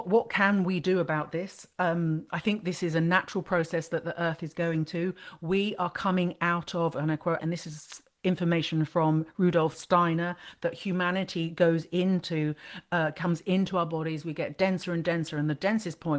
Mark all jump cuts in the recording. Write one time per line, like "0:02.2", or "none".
0:07.4